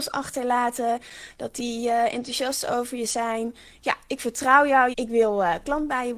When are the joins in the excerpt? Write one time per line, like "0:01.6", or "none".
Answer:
0:04.9